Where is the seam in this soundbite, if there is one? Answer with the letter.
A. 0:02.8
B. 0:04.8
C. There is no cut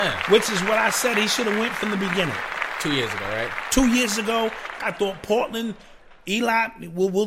B